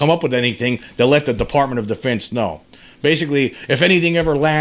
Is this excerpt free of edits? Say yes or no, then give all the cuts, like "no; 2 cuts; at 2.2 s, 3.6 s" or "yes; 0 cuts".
yes; 0 cuts